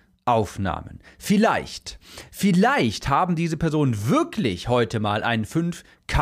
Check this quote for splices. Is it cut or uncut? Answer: uncut